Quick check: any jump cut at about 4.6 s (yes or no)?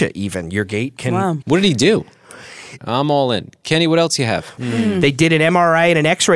yes